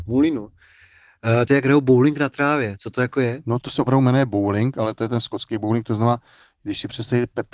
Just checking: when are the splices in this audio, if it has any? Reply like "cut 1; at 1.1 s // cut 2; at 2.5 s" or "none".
cut 1; at 1.5 s // cut 2; at 3.6 s